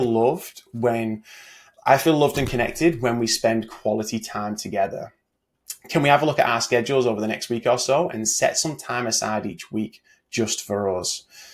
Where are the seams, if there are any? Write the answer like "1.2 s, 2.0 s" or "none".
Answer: none